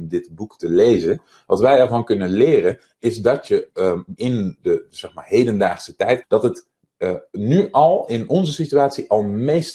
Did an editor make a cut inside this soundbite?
yes; 2 cuts; at 4.2 s, 6.2 s

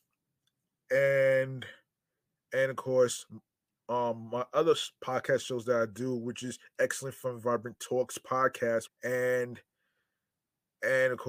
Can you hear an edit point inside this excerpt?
yes; 1 cut; at 8.9 s

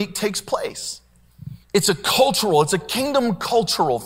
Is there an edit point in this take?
yes; 1 cut; at 1.6 s

